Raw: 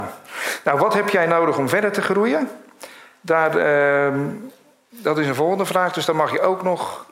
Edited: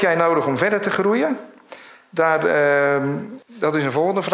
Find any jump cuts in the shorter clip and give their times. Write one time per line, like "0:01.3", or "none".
0:03.4